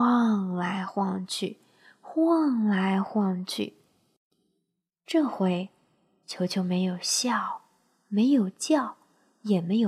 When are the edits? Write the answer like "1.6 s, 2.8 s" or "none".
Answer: none

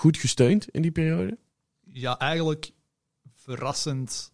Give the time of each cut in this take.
none

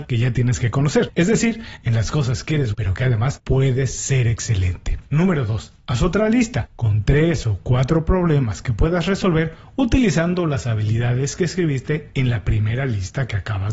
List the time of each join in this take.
2.7 s

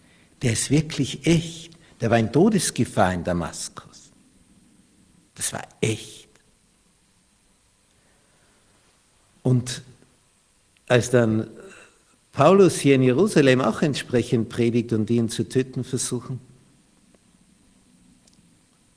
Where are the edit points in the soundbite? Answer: 5.3 s

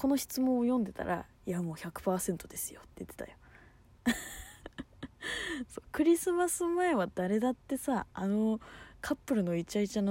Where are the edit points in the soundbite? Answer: none

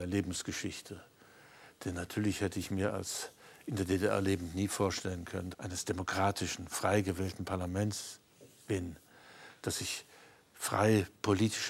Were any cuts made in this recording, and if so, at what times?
5.5 s

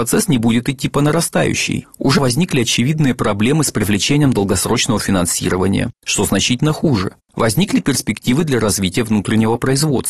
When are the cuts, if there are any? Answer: 2.2 s, 7.3 s

